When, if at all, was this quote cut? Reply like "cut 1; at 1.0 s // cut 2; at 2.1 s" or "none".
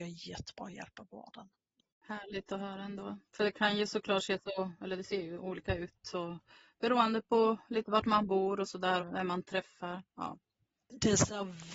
cut 1; at 9.0 s